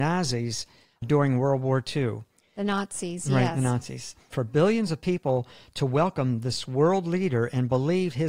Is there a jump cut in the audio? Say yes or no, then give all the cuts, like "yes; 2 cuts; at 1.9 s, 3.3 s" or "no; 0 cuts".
yes; 2 cuts; at 1.0 s, 4.3 s